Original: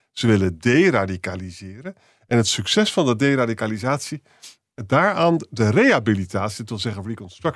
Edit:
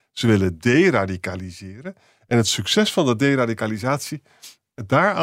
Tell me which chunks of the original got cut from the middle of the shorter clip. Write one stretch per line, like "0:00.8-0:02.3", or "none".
none